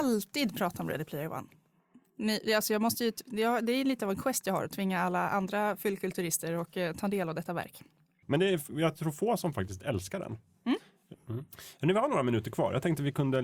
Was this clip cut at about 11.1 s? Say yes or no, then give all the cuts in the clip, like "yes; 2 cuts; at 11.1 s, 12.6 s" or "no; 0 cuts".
yes; 2 cuts; at 8.2 s, 11.1 s